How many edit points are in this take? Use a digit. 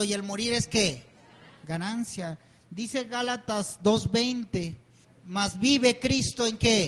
1